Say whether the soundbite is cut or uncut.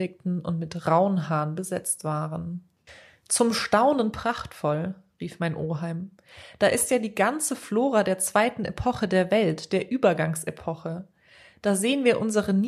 uncut